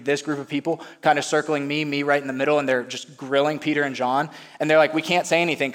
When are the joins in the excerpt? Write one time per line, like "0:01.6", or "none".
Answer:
none